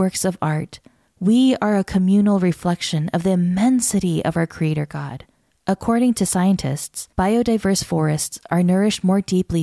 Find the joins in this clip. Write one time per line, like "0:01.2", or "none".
0:05.5
0:07.1